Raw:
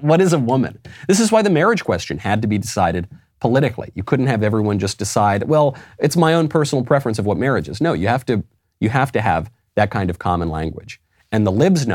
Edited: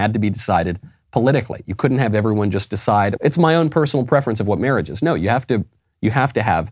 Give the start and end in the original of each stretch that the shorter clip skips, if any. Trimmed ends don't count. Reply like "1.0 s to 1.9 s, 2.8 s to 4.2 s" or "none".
5.4 s to 6.0 s